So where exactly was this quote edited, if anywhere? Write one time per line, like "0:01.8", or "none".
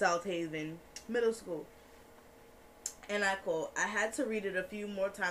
none